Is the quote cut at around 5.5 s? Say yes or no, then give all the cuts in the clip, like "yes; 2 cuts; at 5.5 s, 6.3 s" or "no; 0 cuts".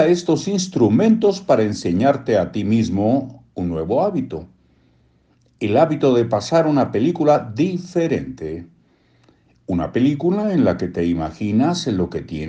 no; 0 cuts